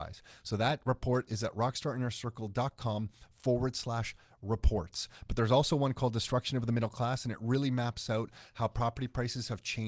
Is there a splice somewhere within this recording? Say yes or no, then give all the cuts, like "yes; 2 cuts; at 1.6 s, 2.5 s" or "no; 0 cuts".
no; 0 cuts